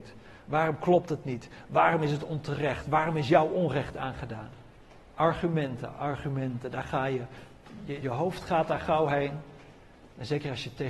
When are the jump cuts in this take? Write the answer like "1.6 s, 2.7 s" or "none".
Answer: 5.9 s, 8.0 s